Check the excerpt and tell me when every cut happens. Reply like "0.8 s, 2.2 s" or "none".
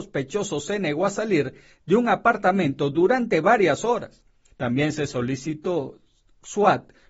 4.5 s